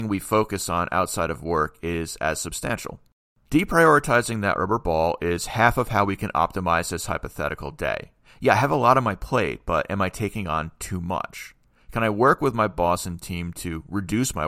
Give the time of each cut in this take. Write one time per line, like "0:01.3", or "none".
none